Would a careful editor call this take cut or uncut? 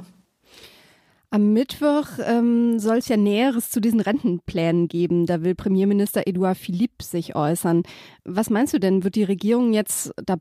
uncut